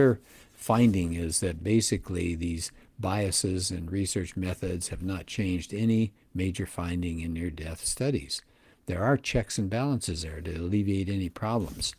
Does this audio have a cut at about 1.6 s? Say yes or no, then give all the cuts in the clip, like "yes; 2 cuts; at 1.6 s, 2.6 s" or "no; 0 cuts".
no; 0 cuts